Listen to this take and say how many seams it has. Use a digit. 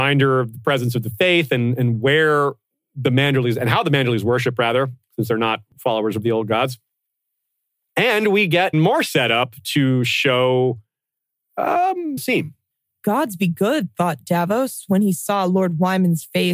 2